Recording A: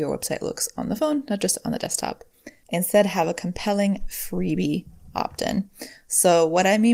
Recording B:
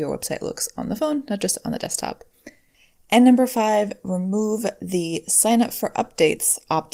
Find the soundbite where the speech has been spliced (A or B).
A